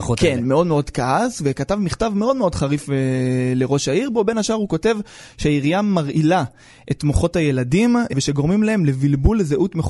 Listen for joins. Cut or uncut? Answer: uncut